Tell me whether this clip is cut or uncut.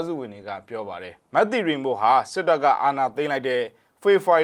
cut